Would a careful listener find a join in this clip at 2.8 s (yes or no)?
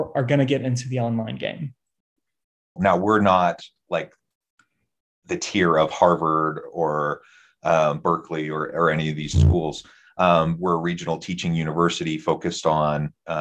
yes